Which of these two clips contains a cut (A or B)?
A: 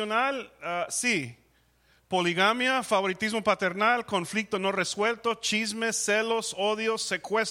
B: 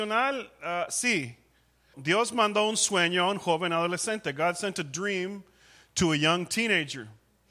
B